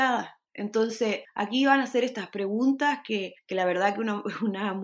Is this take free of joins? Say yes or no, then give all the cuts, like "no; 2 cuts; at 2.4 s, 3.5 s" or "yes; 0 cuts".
yes; 0 cuts